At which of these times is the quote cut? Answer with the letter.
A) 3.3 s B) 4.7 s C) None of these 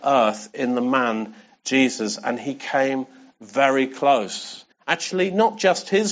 B